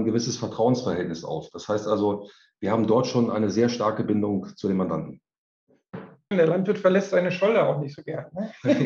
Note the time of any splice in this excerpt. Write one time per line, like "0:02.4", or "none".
0:06.3